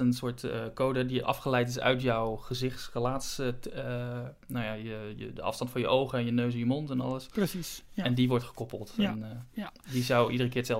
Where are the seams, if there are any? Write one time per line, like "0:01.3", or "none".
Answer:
none

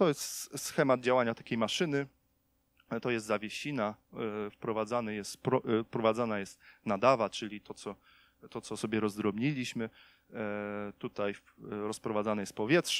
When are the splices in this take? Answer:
none

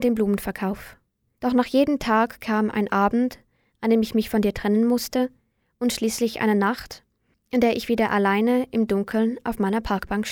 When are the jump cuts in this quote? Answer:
0:01.3

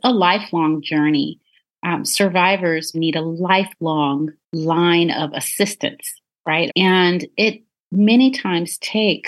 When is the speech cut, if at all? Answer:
0:02.9
0:04.4
0:06.7

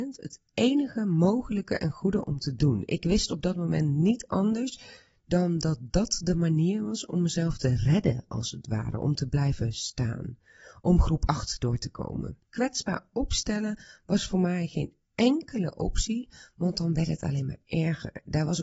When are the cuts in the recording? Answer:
0:12.4
0:15.0

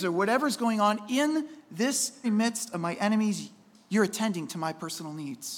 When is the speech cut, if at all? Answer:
0:02.2

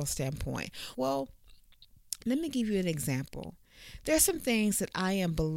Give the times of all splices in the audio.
0:00.9

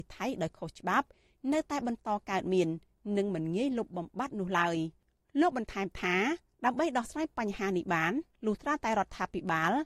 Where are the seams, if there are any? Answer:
none

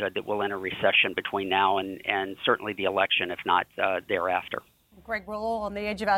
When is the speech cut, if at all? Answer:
none

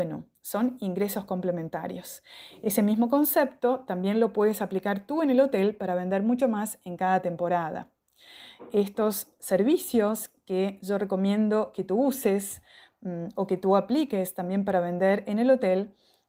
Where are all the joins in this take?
none

